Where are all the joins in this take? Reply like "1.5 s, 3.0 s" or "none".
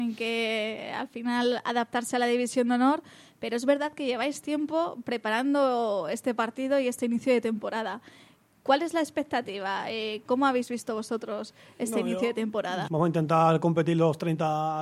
10.2 s, 12.9 s